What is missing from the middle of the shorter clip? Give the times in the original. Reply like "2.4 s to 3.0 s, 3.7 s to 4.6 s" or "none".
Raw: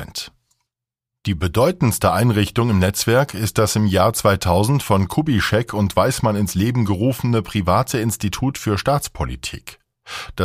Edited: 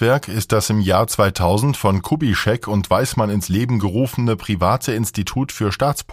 none